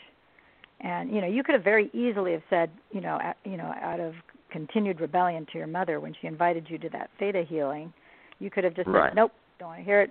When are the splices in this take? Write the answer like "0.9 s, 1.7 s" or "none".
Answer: none